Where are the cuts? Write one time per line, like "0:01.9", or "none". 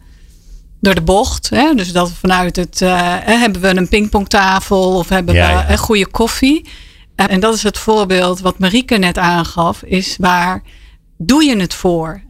0:07.3

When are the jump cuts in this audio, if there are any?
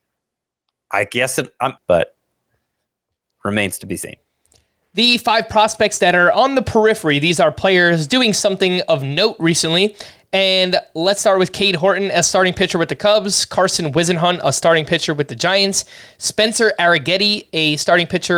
0:01.8

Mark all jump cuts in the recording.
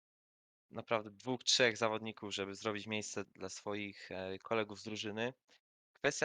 0:03.2

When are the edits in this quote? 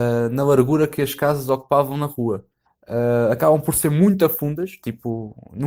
0:02.6

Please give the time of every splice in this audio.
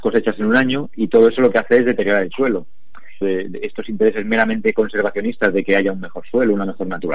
0:03.2

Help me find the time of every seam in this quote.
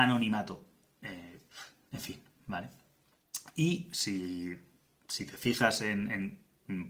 none

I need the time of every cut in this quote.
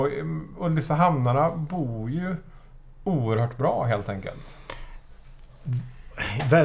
none

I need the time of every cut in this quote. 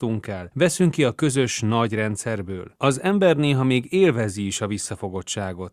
0:02.7

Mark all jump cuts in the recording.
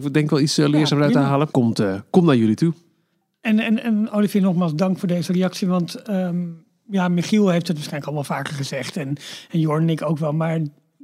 0:01.5

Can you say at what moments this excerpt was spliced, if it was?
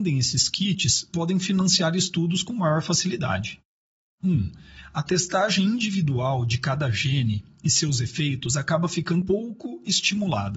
0:04.1
0:09.2

